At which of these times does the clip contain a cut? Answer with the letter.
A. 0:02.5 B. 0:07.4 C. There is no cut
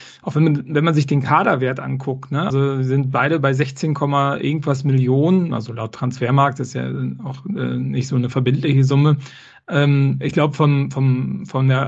A